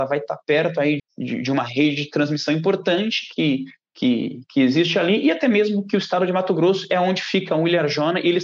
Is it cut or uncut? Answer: cut